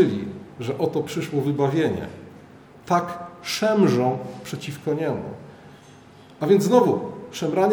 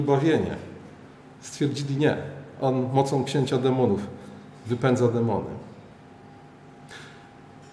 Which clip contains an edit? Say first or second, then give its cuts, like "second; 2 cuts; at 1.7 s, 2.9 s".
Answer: first; 1 cut; at 2.7 s